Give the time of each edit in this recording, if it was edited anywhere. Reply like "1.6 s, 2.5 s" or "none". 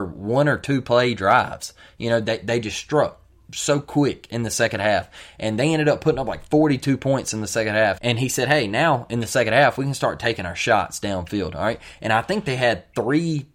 8.0 s